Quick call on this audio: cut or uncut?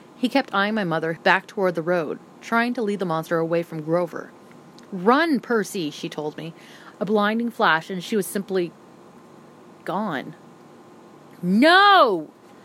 cut